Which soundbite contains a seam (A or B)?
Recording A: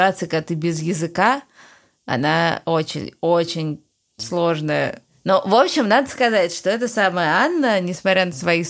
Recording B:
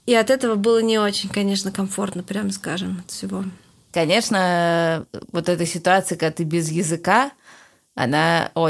B